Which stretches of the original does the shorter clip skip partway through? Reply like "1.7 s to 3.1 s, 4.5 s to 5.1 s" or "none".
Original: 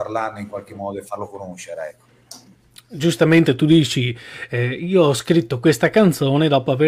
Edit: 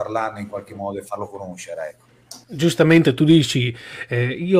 2.4 s to 2.8 s